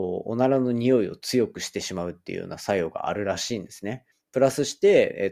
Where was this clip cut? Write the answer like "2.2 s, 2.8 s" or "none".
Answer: 4.1 s